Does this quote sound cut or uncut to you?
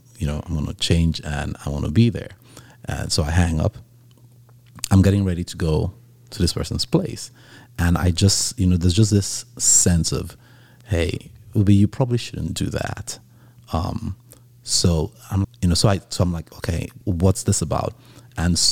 cut